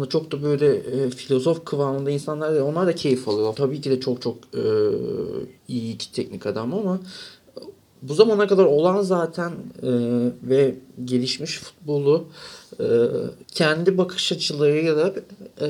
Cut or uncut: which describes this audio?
cut